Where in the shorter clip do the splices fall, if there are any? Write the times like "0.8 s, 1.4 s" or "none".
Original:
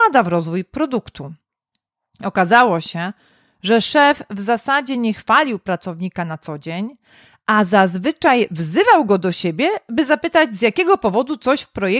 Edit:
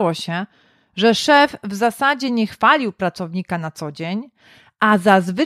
none